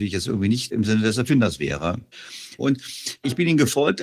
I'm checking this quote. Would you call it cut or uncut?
cut